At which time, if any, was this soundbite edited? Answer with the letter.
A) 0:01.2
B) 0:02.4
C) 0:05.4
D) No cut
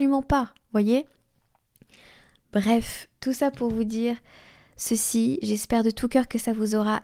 D